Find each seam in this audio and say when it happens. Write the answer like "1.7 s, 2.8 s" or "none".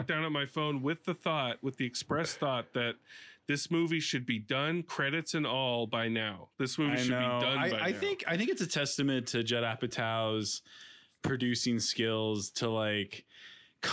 none